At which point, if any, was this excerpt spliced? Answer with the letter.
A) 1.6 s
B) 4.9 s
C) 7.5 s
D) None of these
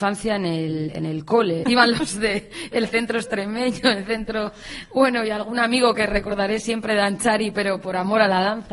A